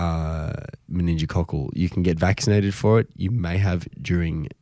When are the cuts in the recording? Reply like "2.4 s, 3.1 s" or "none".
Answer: none